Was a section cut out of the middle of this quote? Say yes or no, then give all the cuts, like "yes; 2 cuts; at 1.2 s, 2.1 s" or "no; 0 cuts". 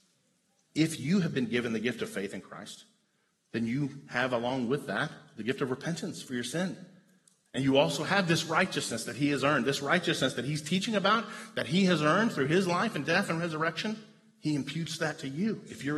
no; 0 cuts